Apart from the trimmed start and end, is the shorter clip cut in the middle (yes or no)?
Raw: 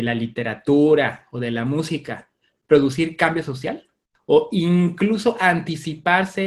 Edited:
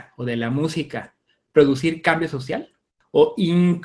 no